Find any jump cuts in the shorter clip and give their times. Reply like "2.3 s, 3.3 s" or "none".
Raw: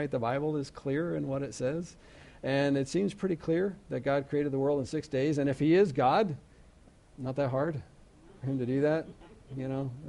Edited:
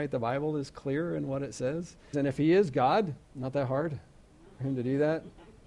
2.1 s, 3.2 s